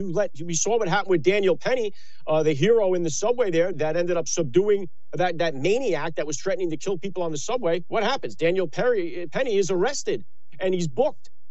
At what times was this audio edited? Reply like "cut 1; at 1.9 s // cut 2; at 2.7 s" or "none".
cut 1; at 3.7 s